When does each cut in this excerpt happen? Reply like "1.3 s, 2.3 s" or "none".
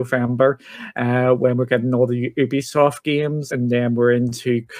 3.5 s